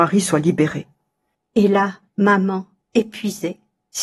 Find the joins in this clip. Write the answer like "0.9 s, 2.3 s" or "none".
1.3 s